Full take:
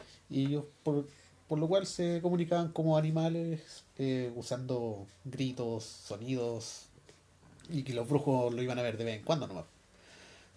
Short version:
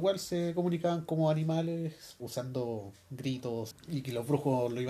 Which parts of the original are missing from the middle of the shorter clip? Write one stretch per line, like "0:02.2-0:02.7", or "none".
0:03.9-0:04.3
0:05.9-0:07.5